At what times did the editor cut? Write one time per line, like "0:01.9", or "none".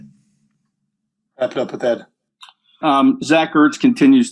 0:02.8